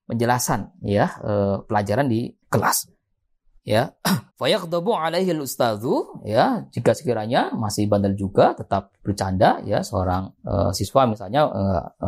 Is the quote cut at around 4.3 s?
yes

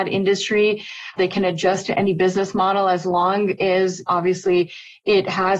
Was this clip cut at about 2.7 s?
no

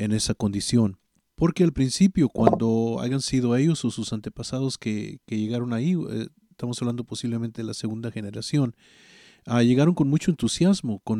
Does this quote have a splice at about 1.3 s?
yes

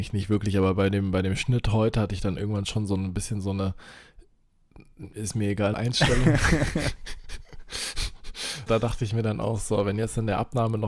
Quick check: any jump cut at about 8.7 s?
yes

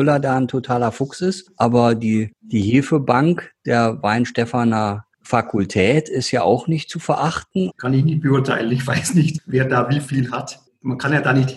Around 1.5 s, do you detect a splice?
no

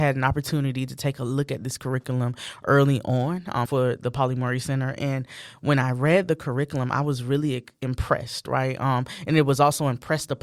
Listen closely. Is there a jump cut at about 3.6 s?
yes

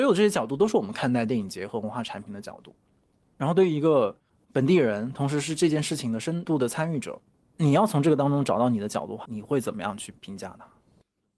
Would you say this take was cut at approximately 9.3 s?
yes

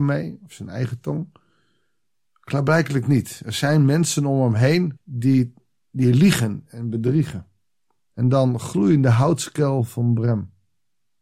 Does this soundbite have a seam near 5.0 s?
yes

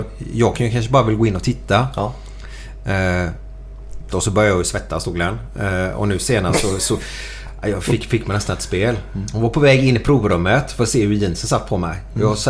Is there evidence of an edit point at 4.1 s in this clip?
yes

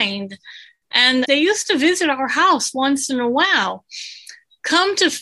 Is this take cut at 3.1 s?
no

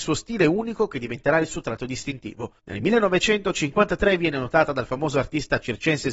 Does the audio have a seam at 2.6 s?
yes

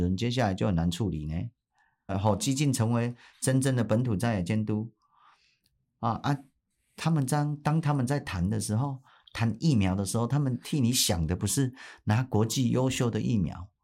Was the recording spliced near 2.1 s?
yes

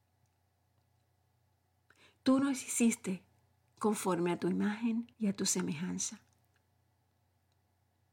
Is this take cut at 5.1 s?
yes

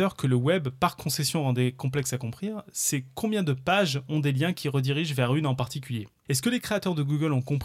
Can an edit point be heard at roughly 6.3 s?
yes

